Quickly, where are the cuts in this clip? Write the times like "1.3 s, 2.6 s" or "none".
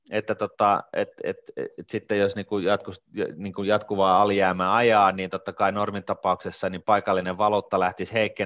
none